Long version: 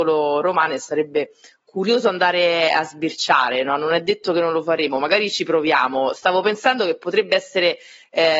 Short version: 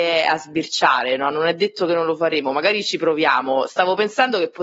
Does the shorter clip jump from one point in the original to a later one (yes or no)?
no